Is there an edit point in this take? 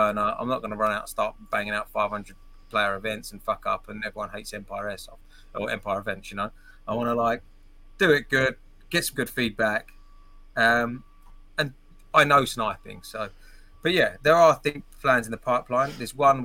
no; 0 cuts

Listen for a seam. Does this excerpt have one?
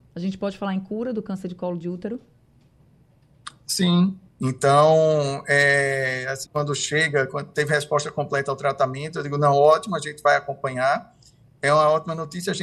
yes; 2 cuts; at 4.3 s, 6.4 s

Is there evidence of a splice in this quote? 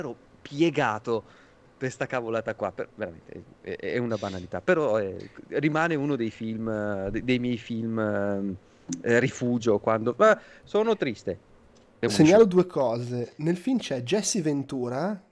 no; 0 cuts

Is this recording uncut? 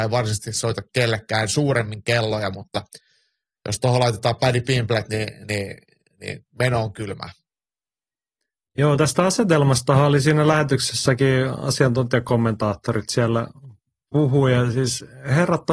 yes; 0 cuts

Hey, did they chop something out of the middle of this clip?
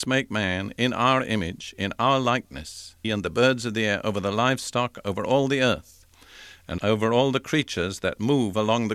yes; 1 cut; at 3.0 s

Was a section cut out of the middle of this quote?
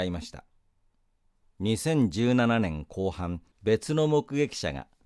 yes; 2 cuts; at 1.4 s, 3.5 s

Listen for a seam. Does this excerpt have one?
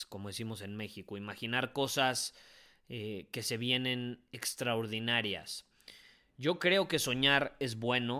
no; 0 cuts

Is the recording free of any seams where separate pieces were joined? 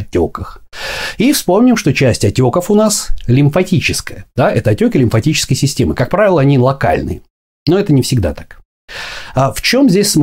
yes; 0 cuts

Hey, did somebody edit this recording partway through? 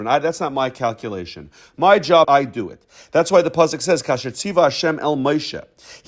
yes; 1 cut; at 2.2 s

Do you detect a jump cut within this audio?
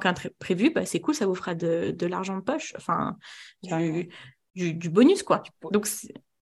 no; 0 cuts

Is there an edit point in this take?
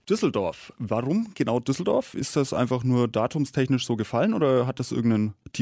no; 0 cuts

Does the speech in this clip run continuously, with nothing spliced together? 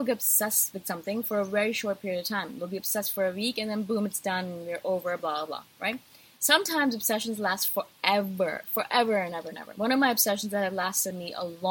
no; 1 cut; at 6.4 s

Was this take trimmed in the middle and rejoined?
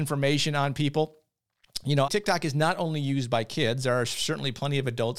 yes; 1 cut; at 2.1 s

